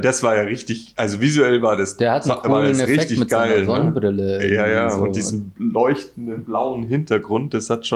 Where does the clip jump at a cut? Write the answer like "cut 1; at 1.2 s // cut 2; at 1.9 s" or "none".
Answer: none